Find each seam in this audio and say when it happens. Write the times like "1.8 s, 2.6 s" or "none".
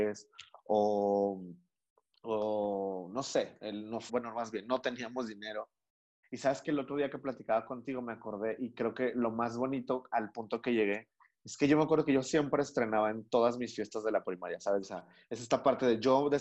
4.1 s, 6.2 s, 14.8 s

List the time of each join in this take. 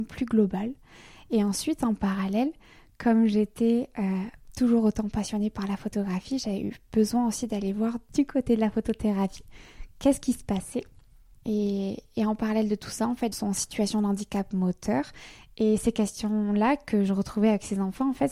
11.4 s, 13.3 s

